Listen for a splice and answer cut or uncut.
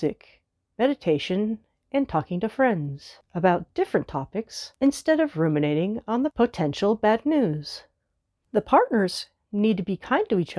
uncut